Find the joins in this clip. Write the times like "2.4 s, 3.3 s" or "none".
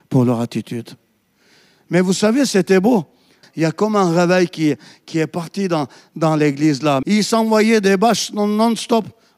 3.4 s, 7.0 s